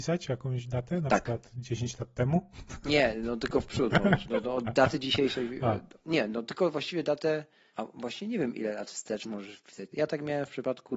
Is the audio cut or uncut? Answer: cut